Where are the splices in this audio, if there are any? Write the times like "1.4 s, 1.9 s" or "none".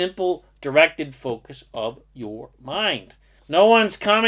3.4 s

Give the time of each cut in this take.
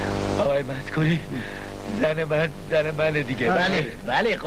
none

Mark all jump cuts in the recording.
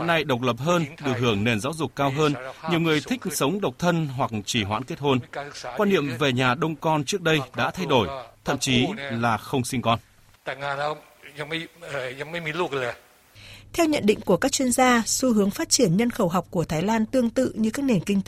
8.3 s

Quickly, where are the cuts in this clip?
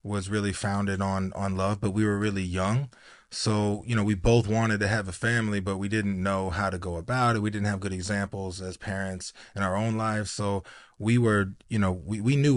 none

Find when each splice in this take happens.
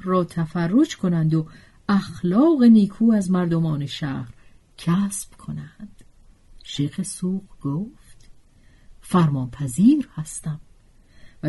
none

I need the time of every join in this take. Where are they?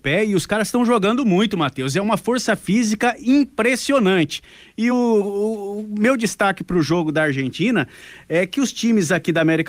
none

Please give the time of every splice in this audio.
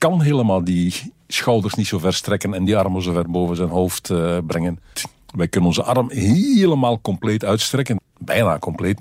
4.9 s, 8.0 s

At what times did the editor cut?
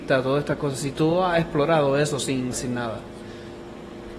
2.5 s

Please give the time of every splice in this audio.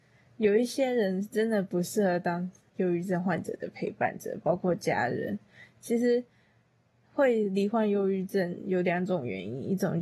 none

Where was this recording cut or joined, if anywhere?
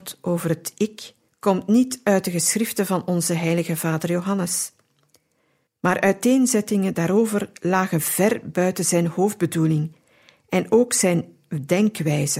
1.3 s, 5.7 s

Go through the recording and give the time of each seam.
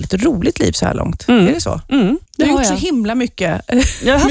2.3 s

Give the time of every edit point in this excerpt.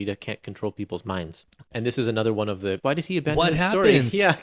2.8 s

